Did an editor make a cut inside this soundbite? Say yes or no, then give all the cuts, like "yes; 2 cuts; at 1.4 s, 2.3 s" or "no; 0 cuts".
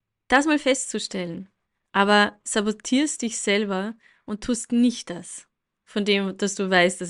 yes; 1 cut; at 1.9 s